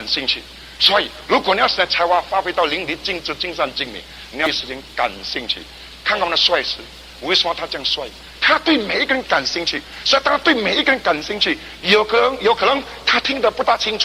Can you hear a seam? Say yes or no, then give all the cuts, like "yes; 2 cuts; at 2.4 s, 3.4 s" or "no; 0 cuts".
yes; 2 cuts; at 8.4 s, 11.8 s